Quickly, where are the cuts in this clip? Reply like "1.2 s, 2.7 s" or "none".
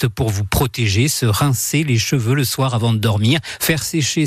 none